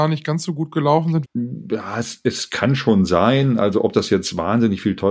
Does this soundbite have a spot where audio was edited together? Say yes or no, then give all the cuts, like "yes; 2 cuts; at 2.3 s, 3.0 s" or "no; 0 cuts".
yes; 1 cut; at 1.2 s